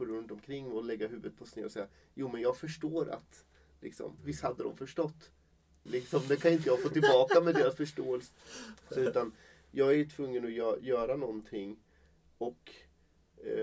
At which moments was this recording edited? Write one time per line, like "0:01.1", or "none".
0:04.2
0:05.9